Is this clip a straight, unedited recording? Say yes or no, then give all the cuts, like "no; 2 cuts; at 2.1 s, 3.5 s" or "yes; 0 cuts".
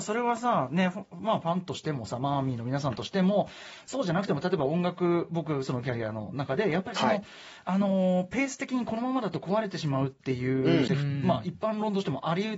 no; 1 cut; at 10.9 s